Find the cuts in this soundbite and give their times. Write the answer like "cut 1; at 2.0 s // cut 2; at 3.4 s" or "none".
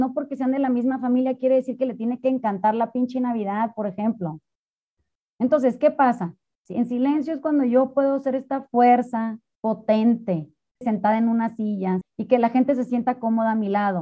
cut 1; at 6.5 s // cut 2; at 10.8 s // cut 3; at 12.0 s